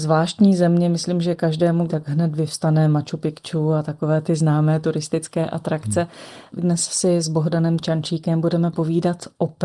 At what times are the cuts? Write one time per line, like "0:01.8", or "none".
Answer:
0:01.9
0:06.6